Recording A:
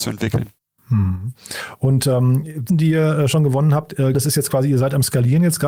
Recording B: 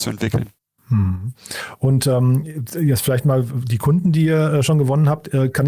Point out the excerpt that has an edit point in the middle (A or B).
A